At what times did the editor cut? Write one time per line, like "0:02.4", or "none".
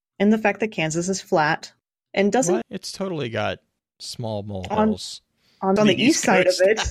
0:02.6
0:05.8